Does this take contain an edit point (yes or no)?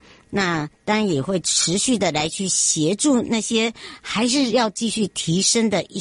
no